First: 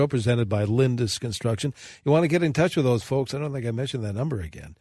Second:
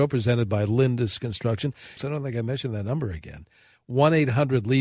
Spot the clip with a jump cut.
second; 1 cut; at 2.0 s

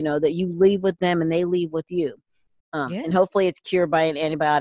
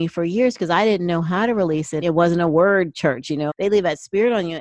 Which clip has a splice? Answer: second; 2 cuts; at 2.0 s, 3.5 s

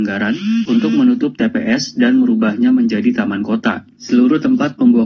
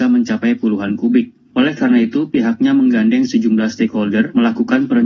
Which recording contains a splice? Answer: first; 1 cut; at 4.0 s

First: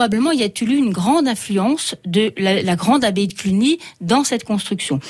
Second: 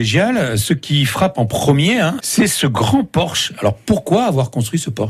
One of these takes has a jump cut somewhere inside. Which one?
second; 1 cut; at 2.2 s

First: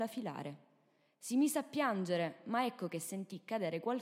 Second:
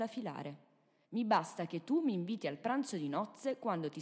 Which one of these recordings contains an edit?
second; 1 cut; at 1.0 s

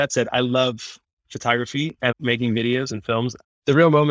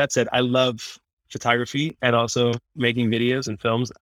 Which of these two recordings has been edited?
first; 1 cut; at 2.1 s

